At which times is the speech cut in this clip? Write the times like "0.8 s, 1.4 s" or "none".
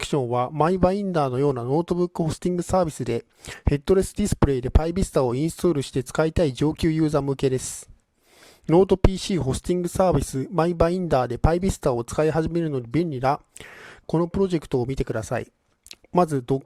14.0 s